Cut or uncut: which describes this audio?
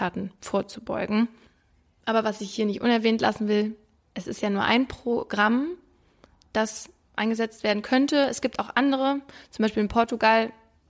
uncut